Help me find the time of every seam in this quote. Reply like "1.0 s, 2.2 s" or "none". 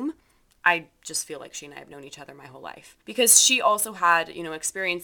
3.0 s